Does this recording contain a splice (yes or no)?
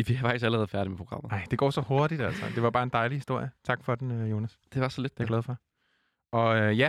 no